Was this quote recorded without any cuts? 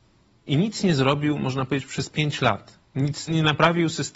no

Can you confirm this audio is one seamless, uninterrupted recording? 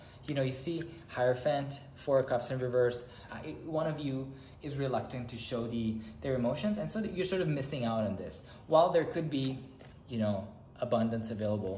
no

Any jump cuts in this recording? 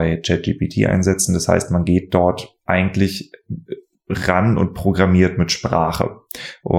no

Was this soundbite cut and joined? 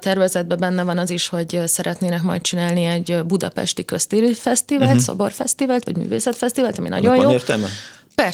no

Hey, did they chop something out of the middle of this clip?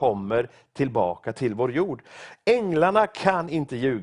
no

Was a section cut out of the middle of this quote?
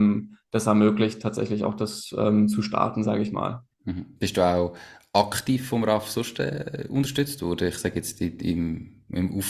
no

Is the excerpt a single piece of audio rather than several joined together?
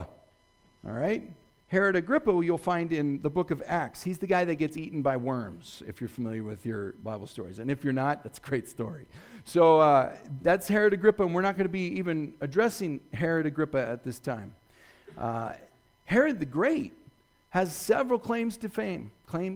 yes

